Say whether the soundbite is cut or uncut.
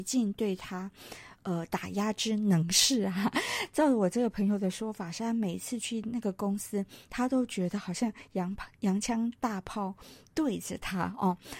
uncut